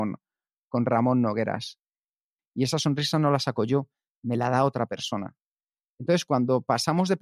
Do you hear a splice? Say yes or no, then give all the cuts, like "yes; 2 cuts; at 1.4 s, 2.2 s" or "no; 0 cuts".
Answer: yes; 1 cut; at 2.4 s